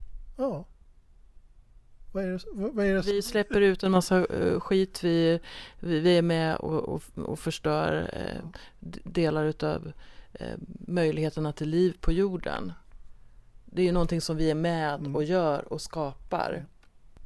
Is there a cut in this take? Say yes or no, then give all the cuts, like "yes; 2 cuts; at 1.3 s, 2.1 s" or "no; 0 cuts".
no; 0 cuts